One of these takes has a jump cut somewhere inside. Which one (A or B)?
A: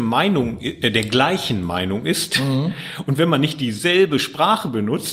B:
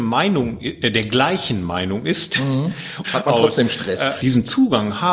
B